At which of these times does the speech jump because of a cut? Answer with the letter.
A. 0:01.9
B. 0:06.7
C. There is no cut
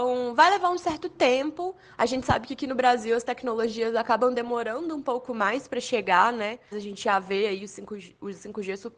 B